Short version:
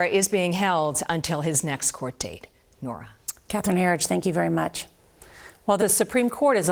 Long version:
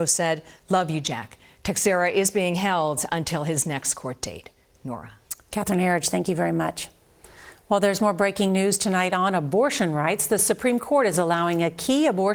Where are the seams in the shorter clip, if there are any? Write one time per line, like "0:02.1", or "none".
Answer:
0:05.8